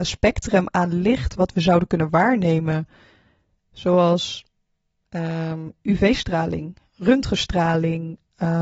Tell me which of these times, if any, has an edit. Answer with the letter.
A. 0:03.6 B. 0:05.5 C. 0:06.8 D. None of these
D